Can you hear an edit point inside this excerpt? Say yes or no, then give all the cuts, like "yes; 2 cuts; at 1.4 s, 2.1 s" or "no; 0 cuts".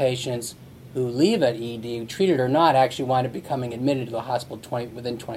no; 0 cuts